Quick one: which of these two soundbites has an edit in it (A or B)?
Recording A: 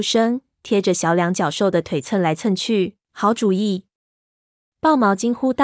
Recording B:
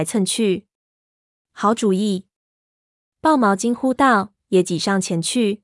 A